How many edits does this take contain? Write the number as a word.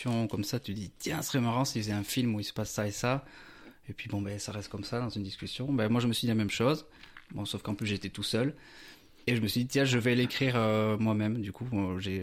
zero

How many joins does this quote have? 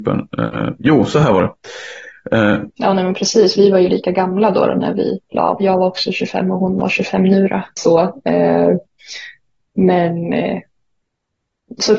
two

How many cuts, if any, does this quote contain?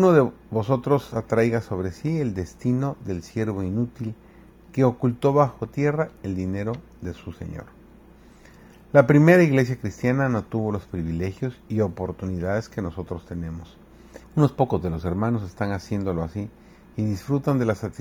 one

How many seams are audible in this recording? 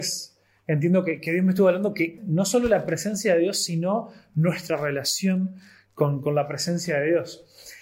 one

